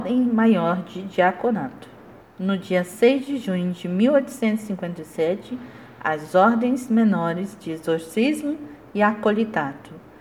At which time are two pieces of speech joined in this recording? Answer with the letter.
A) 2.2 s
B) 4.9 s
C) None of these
A